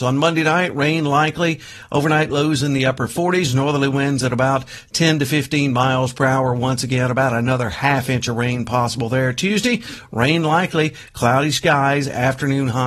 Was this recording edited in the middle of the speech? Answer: no; 0 cuts

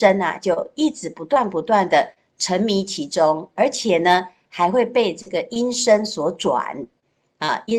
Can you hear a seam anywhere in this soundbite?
no; 0 cuts

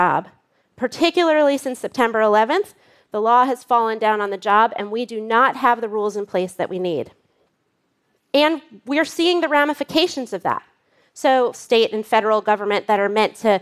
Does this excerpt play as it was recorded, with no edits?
no; 1 cut; at 11.5 s

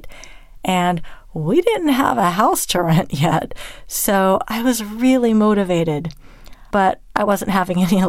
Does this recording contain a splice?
yes; 1 cut; at 6.7 s

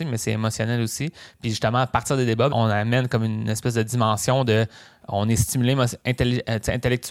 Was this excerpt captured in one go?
no; 1 cut; at 2.5 s

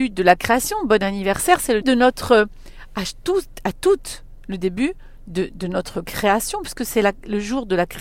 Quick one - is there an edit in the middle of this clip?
yes; 1 cut; at 1.8 s

